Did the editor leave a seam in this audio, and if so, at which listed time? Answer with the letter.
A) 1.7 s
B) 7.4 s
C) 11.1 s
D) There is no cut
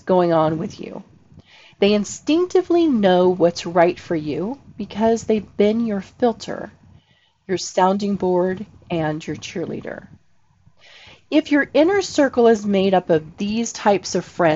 A